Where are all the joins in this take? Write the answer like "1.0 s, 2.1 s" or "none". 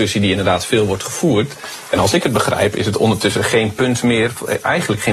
none